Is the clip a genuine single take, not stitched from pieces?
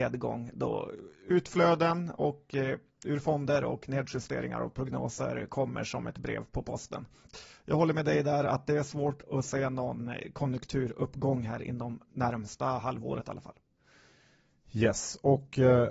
yes; 0 cuts

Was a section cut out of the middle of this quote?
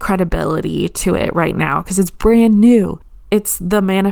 no; 0 cuts

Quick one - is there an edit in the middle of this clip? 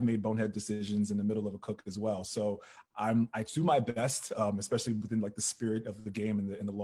no; 0 cuts

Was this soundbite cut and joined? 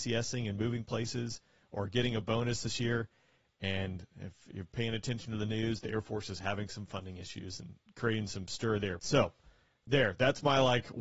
yes; 1 cut; at 9.0 s

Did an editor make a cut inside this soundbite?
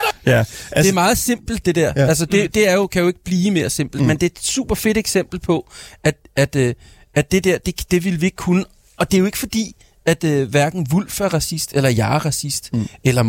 no; 0 cuts

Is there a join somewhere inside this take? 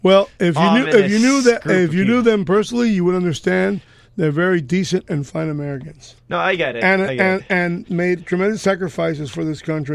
yes; 1 cut; at 6.2 s

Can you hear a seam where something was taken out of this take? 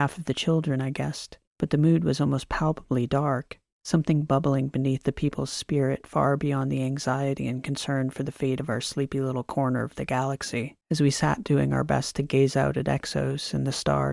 yes; 1 cut; at 10.8 s

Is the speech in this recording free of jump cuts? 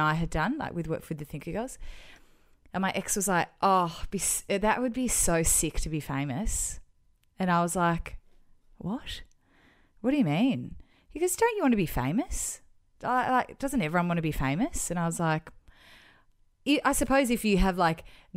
yes; 0 cuts

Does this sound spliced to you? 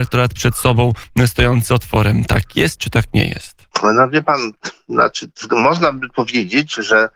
no; 0 cuts

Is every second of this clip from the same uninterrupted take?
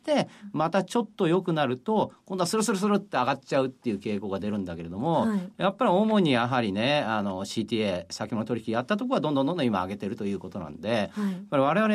yes; 0 cuts

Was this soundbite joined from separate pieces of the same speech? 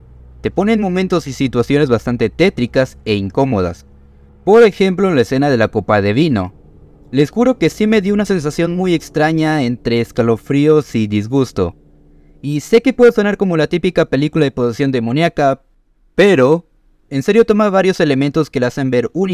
no; 0 cuts

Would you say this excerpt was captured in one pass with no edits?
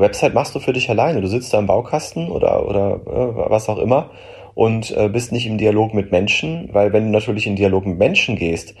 yes; 0 cuts

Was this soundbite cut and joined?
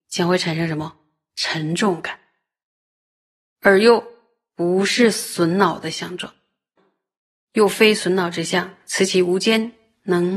yes; 1 cut; at 6.8 s

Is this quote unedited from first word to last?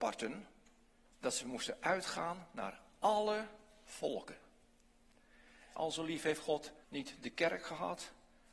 no; 3 cuts; at 1.1 s, 5.8 s, 6.8 s

